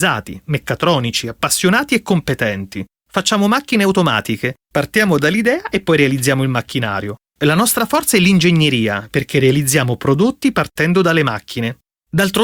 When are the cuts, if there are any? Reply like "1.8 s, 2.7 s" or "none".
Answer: none